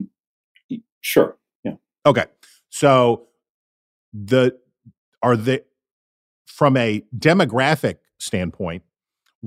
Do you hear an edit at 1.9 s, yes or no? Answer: no